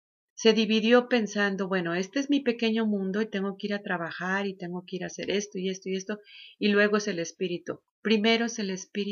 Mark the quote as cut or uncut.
cut